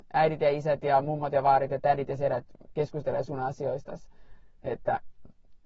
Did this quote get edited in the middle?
no; 0 cuts

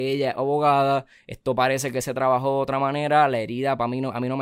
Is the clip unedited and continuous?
yes; 0 cuts

